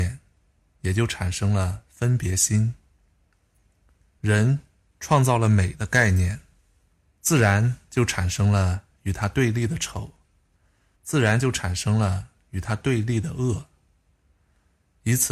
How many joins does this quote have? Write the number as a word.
two